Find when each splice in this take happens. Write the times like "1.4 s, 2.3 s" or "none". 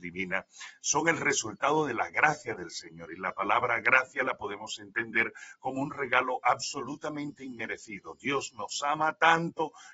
none